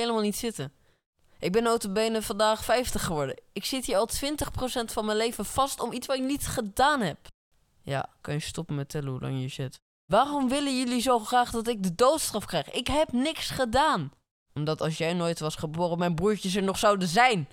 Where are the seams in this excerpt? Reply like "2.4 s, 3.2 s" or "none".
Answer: 8.2 s